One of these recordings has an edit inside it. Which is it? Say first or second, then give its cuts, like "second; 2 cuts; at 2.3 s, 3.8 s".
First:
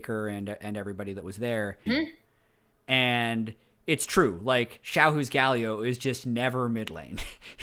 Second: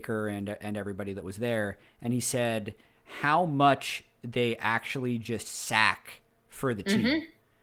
first; 1 cut; at 1.9 s